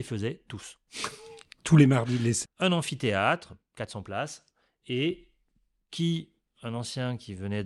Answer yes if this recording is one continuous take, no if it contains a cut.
no